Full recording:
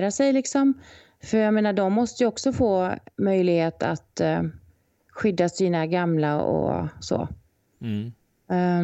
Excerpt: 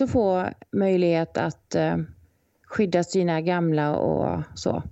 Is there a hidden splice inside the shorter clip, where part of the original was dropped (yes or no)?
no